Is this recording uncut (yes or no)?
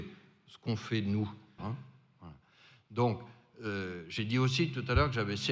no